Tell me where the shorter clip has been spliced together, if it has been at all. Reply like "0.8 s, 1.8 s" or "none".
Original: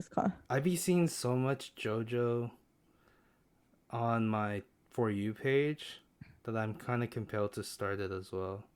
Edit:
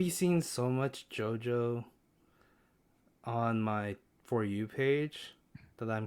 none